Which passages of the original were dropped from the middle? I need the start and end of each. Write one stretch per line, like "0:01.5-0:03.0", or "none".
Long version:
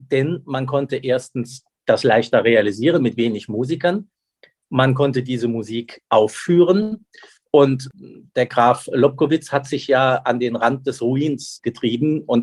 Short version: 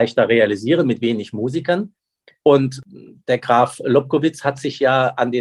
0:04.6-0:07.5